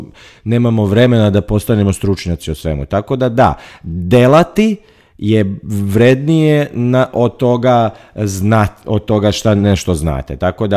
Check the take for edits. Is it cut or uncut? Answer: uncut